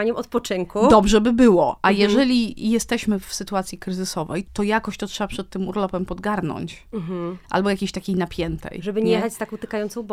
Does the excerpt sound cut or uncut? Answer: cut